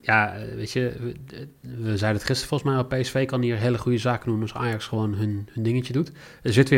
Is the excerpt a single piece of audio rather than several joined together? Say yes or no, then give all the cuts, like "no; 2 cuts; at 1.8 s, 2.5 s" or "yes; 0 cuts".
yes; 0 cuts